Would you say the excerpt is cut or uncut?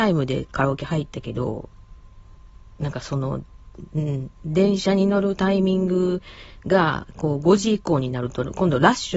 uncut